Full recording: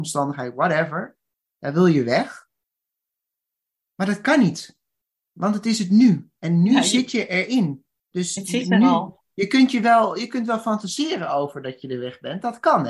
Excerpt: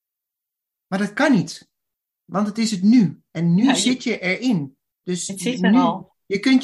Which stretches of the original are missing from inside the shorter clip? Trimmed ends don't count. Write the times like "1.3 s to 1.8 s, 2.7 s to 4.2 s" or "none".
none